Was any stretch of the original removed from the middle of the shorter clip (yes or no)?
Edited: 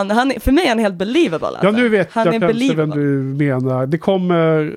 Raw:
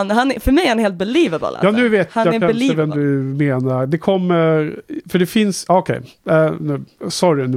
no